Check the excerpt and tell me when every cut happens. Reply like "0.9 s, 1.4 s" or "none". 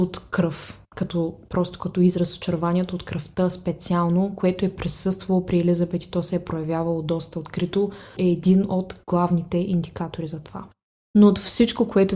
8.2 s